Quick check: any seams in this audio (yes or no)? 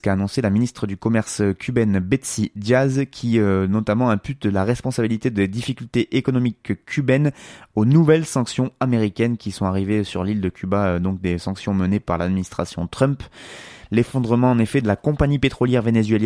yes